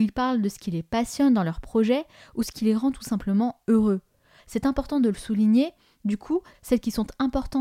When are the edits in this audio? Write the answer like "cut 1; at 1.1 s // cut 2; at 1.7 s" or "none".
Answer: cut 1; at 4.4 s // cut 2; at 6.5 s